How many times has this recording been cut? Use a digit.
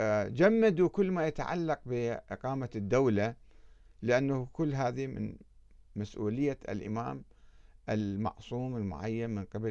0